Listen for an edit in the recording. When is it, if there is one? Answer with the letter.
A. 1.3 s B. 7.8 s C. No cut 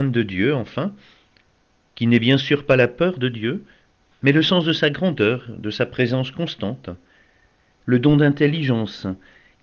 B